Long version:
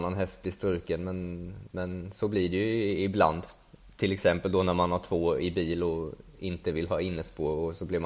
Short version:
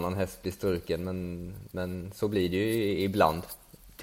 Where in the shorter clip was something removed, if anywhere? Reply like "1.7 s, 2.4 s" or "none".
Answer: none